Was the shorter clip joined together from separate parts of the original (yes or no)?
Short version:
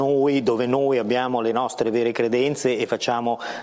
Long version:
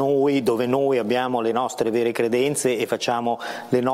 no